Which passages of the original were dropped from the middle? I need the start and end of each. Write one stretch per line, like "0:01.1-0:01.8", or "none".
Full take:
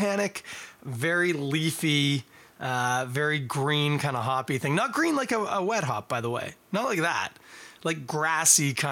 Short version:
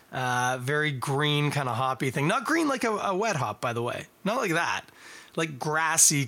none